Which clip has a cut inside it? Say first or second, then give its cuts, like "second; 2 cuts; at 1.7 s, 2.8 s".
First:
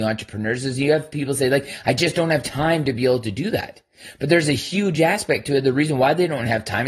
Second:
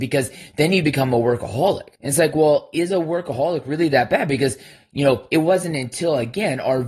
second; 1 cut; at 1.9 s